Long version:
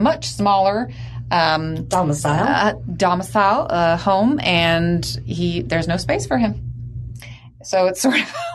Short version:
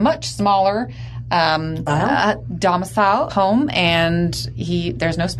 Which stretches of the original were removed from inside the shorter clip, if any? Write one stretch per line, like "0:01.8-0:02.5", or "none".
0:01.9-0:02.2
0:03.7-0:04.0